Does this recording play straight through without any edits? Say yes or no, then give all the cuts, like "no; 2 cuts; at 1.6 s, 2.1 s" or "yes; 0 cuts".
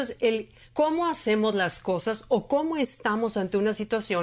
yes; 0 cuts